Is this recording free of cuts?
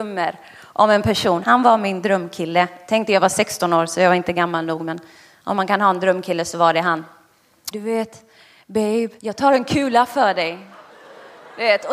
no; 3 cuts; at 1.4 s, 7.7 s, 9.2 s

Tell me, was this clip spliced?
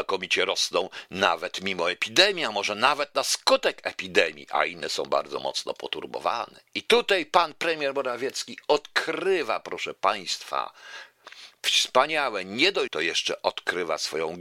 yes; 1 cut; at 12.9 s

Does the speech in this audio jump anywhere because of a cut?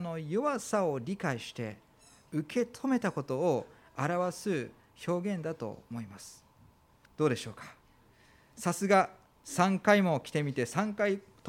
yes; 1 cut; at 7.1 s

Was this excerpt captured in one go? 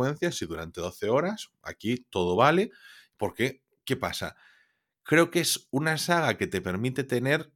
yes; 0 cuts

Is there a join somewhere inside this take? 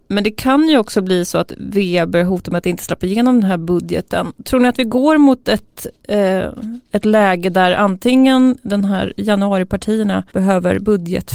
yes; 1 cut; at 10.3 s

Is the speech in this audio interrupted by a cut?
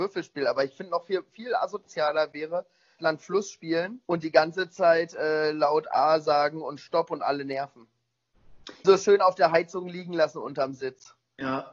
yes; 3 cuts; at 3.0 s, 4.0 s, 8.8 s

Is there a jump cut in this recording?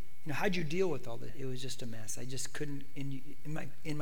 yes; 1 cut; at 1.3 s

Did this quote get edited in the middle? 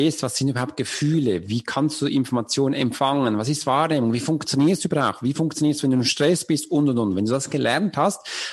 no; 0 cuts

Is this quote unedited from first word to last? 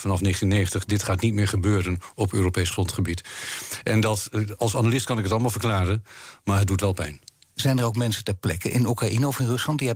yes; 0 cuts

